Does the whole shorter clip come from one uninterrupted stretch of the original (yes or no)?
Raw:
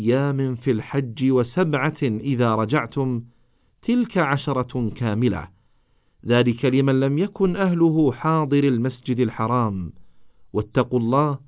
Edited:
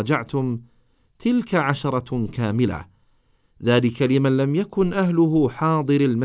yes